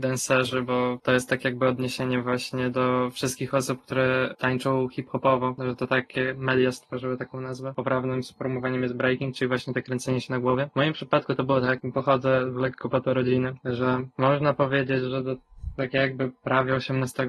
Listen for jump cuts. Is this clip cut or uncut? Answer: uncut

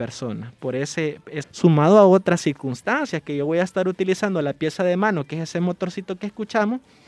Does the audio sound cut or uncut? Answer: cut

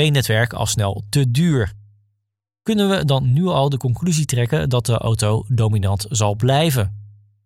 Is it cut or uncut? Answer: uncut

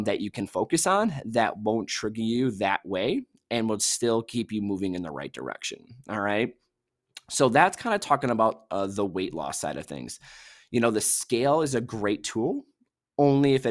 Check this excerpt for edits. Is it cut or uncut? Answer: uncut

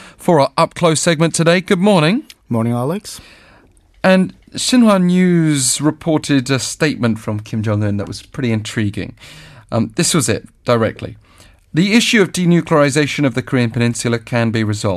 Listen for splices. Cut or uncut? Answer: uncut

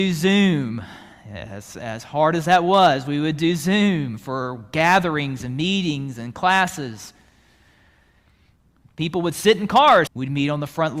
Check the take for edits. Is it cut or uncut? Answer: cut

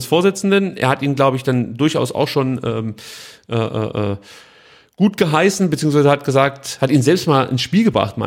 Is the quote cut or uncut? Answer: uncut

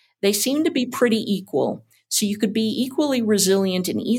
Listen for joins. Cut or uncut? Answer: uncut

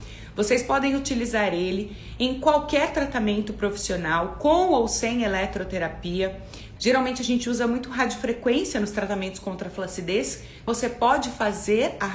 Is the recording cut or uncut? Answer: cut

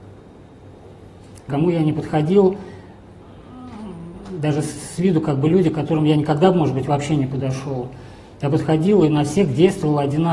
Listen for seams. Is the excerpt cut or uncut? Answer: cut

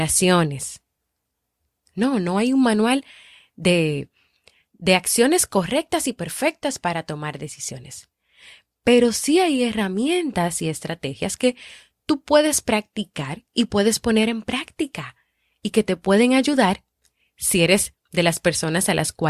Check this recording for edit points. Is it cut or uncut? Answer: uncut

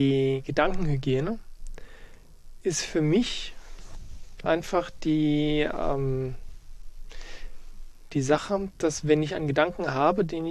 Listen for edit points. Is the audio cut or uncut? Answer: uncut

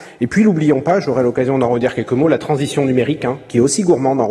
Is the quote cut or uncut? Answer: uncut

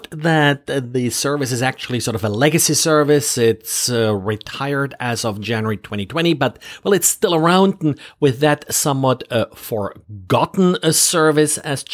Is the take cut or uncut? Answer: uncut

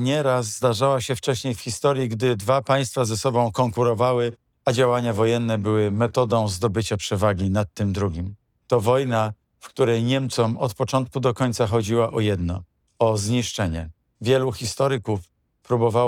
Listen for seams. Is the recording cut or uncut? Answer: uncut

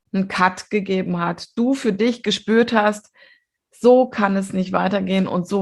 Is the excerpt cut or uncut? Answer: uncut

